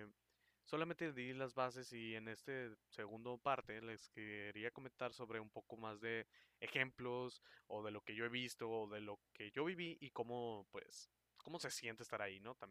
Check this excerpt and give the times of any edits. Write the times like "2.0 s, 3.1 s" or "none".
none